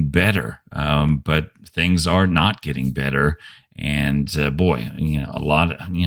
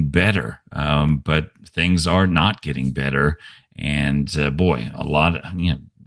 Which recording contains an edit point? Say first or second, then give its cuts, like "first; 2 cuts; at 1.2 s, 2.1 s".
second; 1 cut; at 4.9 s